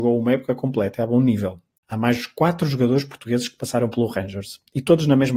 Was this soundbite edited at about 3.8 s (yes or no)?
no